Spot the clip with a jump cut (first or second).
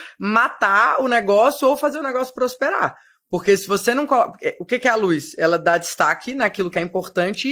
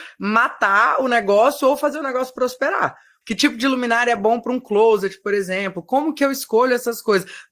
second